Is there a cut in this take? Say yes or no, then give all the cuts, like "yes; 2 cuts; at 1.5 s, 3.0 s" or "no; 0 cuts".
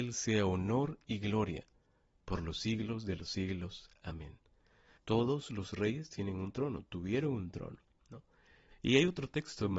yes; 2 cuts; at 5.0 s, 8.7 s